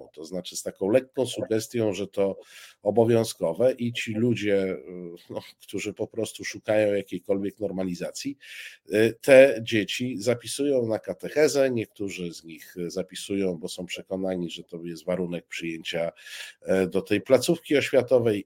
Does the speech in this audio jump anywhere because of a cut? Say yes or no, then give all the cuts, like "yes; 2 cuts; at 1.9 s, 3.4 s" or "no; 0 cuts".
no; 0 cuts